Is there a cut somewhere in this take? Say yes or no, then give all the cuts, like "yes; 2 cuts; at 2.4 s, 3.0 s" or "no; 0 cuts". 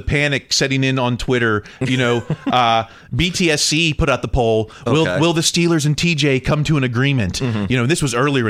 no; 0 cuts